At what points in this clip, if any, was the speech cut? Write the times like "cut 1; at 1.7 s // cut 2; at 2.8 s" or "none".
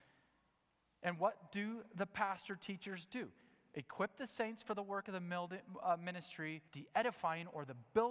cut 1; at 6.7 s